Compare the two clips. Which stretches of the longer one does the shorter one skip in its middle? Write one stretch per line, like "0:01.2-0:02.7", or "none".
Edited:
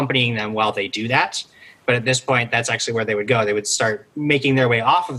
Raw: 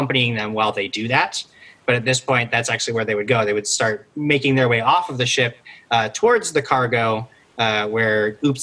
none